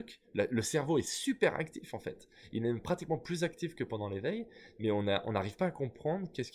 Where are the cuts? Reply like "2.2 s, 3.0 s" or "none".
none

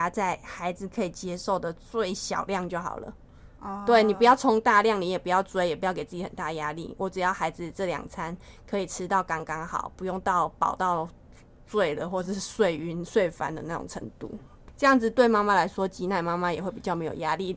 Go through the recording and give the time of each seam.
3.5 s

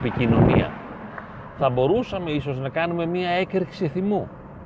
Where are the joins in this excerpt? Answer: none

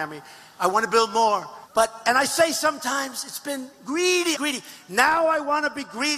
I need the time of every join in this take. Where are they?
1.6 s, 4.3 s

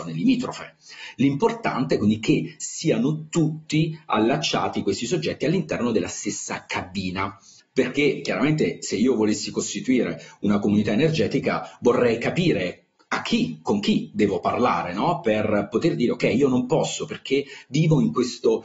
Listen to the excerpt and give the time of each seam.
7.6 s

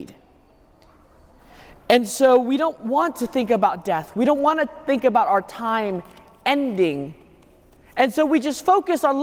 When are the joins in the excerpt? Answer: none

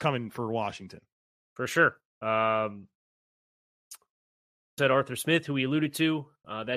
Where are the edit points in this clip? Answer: 2.1 s, 4.8 s

